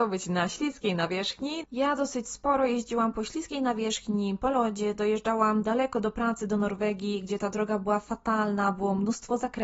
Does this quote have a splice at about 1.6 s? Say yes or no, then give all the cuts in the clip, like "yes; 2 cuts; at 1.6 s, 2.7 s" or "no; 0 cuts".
yes; 1 cut; at 1.6 s